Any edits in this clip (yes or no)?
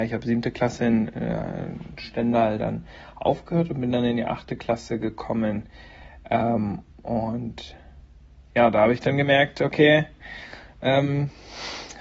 no